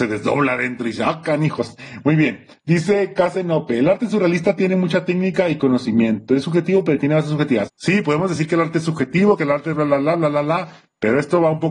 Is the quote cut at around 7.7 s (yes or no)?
yes